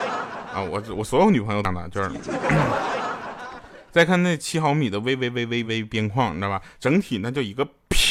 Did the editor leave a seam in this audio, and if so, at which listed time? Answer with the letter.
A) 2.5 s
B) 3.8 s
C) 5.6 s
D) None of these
C